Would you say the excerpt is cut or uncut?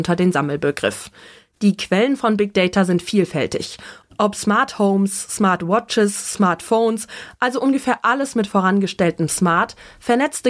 uncut